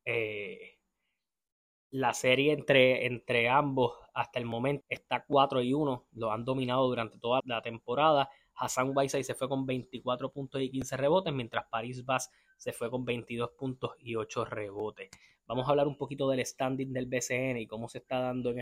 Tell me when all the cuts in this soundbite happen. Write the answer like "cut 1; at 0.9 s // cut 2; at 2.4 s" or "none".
cut 1; at 4.8 s // cut 2; at 7.4 s